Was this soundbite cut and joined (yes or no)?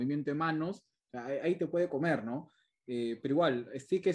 no